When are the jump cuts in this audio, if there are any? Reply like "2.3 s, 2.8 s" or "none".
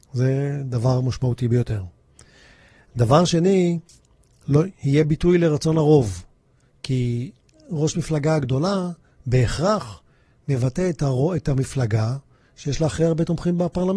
none